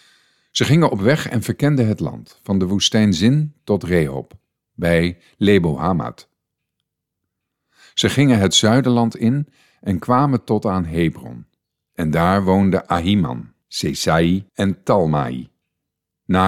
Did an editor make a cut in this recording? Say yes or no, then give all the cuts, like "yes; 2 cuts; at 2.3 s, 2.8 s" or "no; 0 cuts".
no; 0 cuts